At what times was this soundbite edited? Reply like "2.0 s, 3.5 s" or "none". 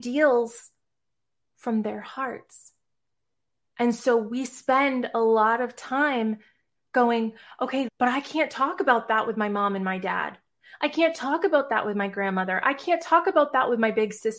7.9 s